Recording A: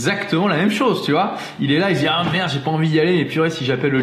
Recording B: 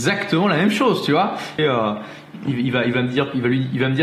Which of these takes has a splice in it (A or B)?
B